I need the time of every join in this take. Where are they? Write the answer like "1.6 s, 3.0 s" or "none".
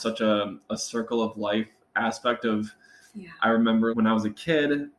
3.9 s